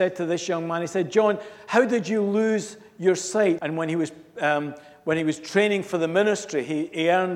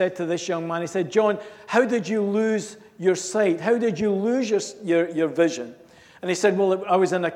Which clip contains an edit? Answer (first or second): first